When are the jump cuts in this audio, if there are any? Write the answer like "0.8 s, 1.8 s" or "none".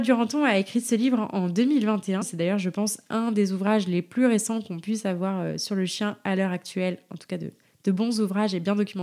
2.2 s